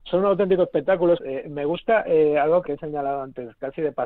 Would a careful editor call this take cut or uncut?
cut